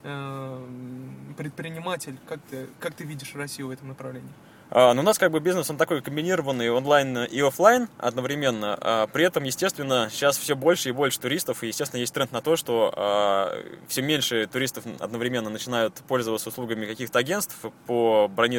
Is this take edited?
no; 0 cuts

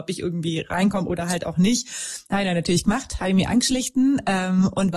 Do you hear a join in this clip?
no; 0 cuts

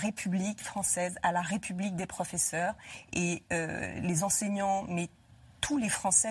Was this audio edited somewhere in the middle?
no; 0 cuts

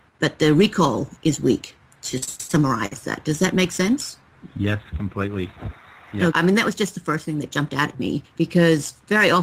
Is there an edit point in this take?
yes; 2 cuts; at 6.3 s, 8.2 s

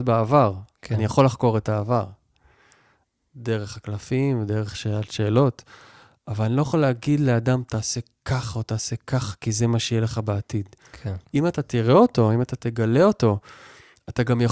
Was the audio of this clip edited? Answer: yes; 1 cut; at 11.2 s

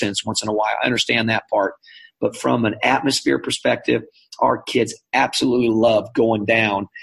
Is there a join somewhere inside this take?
no; 0 cuts

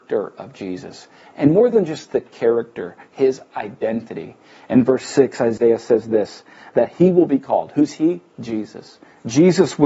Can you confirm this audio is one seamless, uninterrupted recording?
yes; 0 cuts

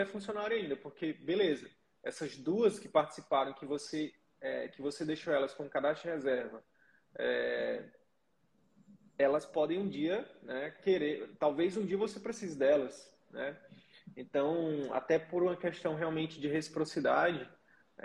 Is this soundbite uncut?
yes; 0 cuts

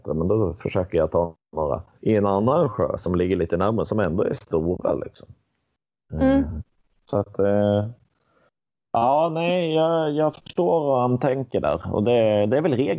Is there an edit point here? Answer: no; 0 cuts

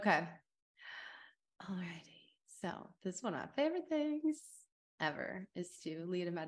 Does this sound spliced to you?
no; 0 cuts

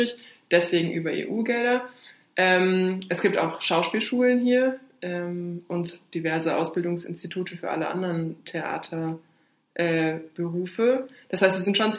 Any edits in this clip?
no; 0 cuts

